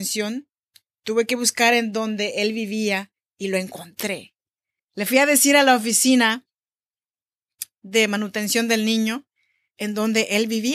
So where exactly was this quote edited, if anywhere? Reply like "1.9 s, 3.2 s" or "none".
4.8 s